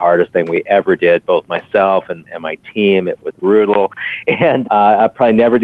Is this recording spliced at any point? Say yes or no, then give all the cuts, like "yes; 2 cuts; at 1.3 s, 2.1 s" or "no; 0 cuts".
yes; 1 cut; at 4.6 s